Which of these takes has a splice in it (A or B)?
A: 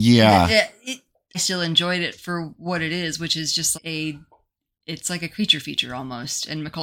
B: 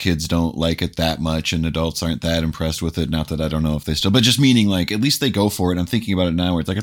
A